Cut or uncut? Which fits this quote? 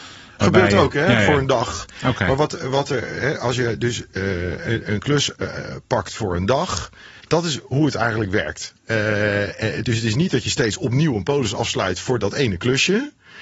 cut